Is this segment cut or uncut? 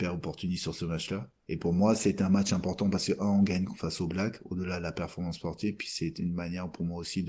uncut